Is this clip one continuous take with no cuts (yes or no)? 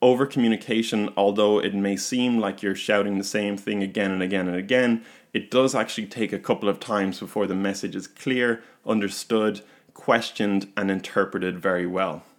yes